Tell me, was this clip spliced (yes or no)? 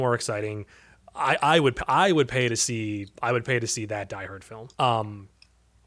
yes